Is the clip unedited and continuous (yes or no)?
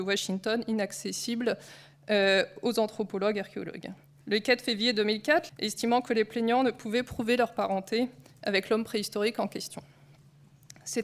no